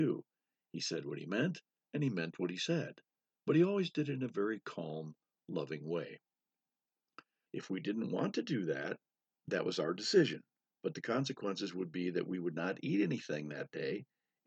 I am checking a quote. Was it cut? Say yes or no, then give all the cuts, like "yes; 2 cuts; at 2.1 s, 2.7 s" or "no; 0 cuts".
yes; 1 cut; at 7.5 s